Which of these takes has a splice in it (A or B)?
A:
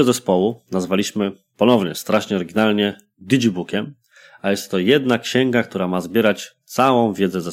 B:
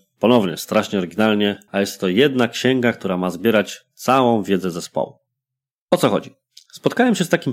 B